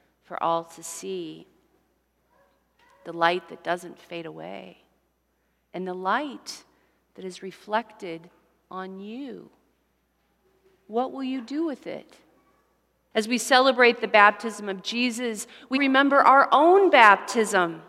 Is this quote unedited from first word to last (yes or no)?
no